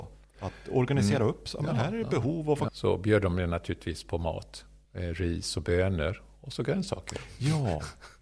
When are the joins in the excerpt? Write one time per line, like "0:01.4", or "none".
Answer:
0:02.7